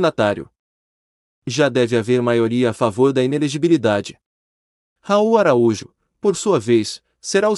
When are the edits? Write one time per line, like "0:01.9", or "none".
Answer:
none